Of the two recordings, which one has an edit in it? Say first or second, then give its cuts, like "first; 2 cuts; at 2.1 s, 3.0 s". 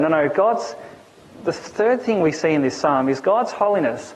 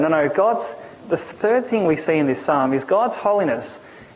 second; 1 cut; at 1.0 s